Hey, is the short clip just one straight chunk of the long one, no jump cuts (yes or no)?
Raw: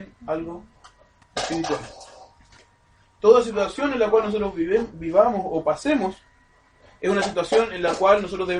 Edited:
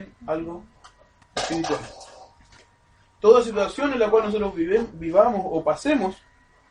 yes